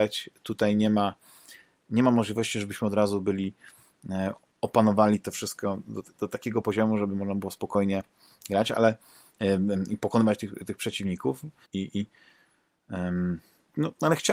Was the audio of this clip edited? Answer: yes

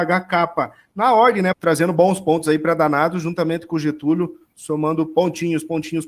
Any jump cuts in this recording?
yes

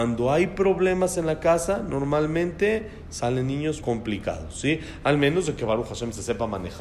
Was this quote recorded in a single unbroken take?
no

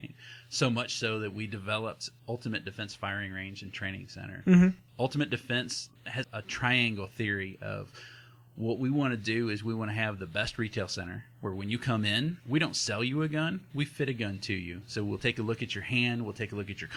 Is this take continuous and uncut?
no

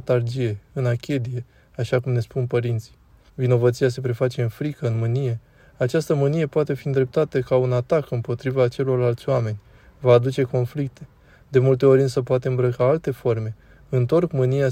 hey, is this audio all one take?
no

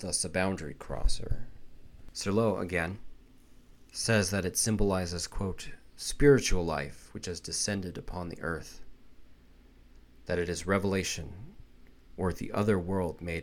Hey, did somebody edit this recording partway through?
yes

